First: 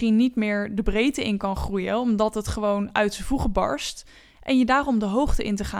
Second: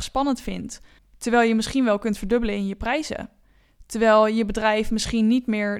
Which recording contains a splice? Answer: second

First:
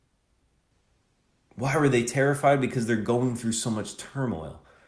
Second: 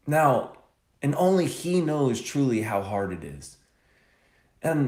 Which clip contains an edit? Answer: second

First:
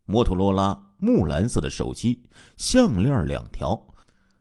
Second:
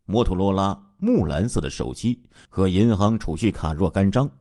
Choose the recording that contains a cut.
second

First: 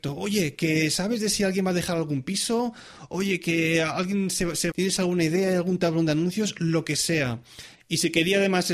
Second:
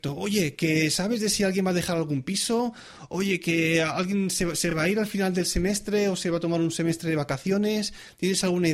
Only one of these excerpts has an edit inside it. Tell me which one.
first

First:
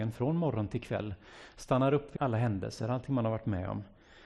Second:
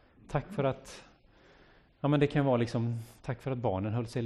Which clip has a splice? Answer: first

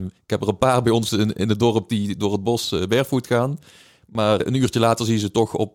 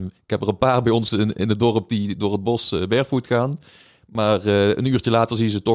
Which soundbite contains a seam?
first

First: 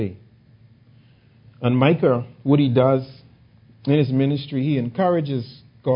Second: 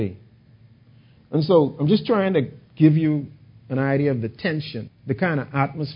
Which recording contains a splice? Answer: second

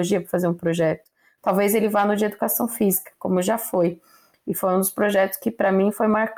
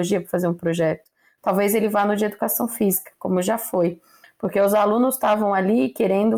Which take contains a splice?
second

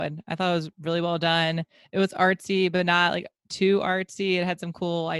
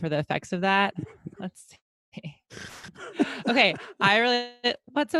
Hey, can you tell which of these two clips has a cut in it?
second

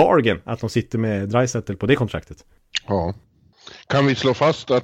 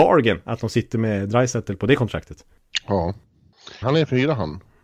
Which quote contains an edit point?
second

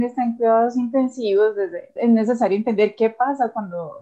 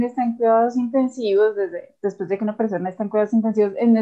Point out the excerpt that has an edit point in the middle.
first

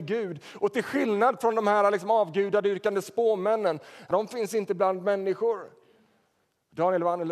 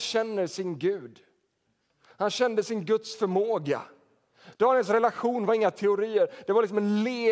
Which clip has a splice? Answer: first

